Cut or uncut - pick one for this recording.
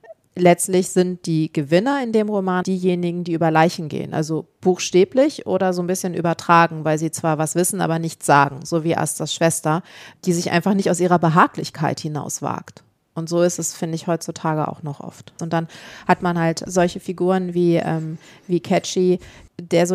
cut